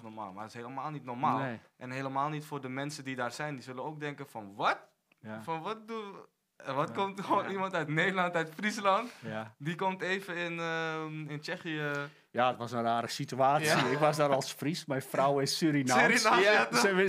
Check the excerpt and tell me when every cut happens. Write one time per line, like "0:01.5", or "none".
none